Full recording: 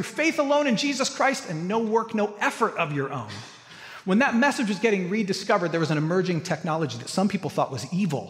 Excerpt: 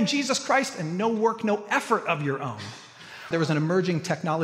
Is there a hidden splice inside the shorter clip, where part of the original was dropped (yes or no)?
yes